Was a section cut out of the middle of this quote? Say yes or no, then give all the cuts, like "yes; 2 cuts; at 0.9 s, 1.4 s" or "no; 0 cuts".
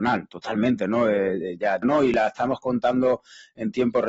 yes; 1 cut; at 1.8 s